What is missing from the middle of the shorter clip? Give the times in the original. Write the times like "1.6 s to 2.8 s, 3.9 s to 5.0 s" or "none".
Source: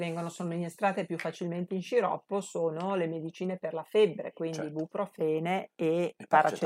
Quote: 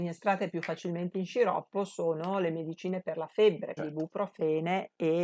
4.3 s to 4.6 s